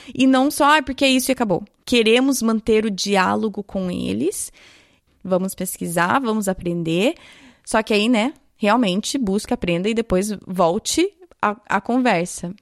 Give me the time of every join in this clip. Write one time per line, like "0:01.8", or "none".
0:05.1